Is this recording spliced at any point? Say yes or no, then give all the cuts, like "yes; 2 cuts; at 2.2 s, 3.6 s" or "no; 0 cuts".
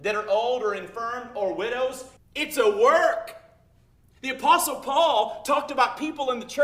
yes; 1 cut; at 2.2 s